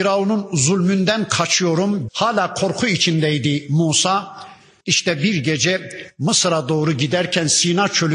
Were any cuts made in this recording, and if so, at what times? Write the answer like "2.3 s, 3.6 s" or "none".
2.1 s, 4.8 s